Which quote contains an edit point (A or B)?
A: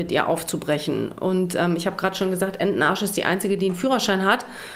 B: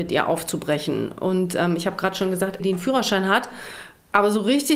B